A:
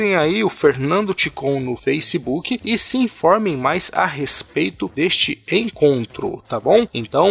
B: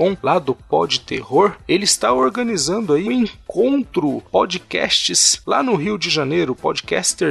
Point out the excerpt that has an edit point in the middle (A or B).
B